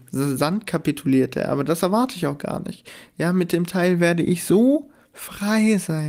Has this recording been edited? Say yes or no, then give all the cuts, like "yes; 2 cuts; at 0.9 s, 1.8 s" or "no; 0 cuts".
no; 0 cuts